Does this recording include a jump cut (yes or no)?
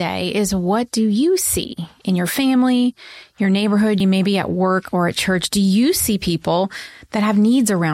yes